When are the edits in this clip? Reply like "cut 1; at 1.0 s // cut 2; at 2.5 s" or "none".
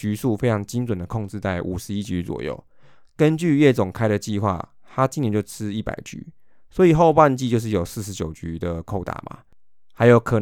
none